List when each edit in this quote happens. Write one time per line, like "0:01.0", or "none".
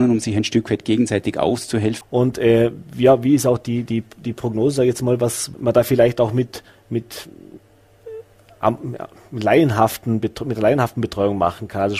0:02.0
0:05.5